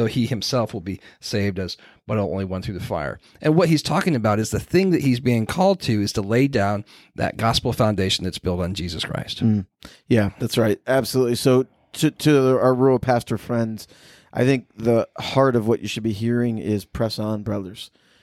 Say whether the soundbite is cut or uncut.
uncut